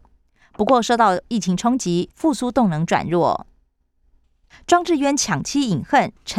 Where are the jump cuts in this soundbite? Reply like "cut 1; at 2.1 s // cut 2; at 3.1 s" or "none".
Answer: cut 1; at 2.1 s // cut 2; at 4.5 s